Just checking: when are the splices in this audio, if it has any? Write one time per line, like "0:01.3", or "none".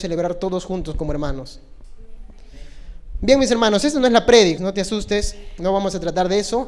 0:04.6